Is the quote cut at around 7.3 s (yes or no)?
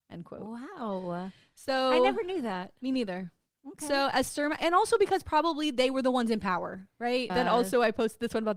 yes